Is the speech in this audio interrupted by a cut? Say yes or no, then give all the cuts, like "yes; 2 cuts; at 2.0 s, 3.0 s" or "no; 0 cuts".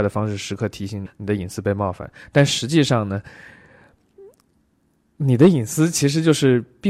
yes; 1 cut; at 1.1 s